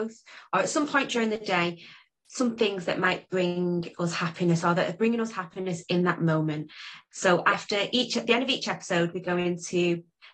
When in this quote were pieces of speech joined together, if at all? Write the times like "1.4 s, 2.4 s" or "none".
7.1 s